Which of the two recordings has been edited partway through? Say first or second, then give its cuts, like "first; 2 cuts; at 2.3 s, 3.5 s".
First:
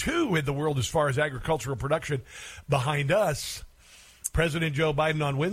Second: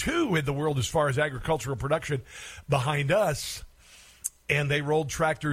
first; 1 cut; at 4.3 s